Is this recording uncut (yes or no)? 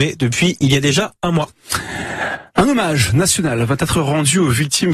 yes